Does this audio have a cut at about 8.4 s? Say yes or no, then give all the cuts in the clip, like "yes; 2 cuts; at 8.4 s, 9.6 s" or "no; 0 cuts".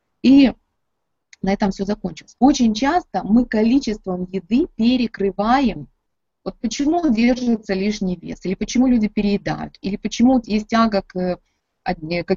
no; 1 cut; at 2.4 s